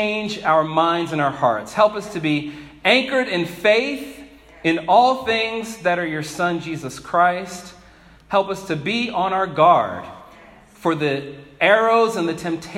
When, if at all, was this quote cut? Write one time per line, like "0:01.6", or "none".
none